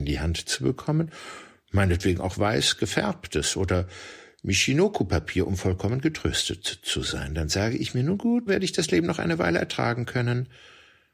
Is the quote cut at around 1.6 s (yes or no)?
no